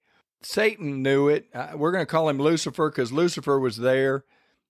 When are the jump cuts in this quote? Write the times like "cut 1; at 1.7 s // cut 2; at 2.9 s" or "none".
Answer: none